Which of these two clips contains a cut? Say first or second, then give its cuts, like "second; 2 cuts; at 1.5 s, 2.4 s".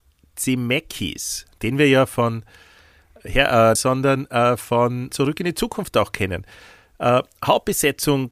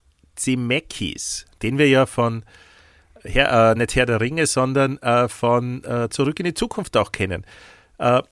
first; 2 cuts; at 3.8 s, 5.1 s